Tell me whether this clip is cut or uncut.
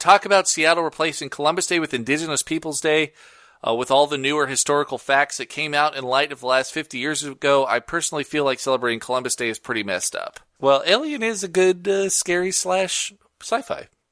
cut